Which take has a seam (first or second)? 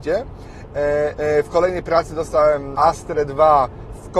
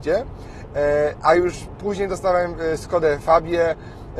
first